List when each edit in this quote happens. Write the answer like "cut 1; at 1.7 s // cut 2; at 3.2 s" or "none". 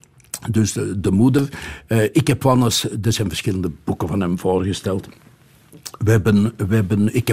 none